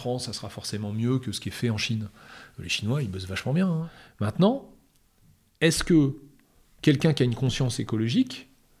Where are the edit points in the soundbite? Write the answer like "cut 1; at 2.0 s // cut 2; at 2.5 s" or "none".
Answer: none